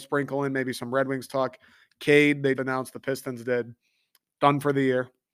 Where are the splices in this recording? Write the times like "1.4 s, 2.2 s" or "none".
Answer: 2.6 s